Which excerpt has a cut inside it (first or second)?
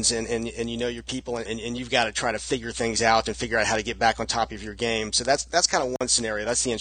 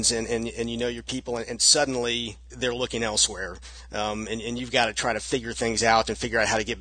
first